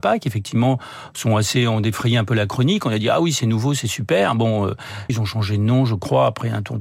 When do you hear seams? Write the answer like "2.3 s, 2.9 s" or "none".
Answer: 5.1 s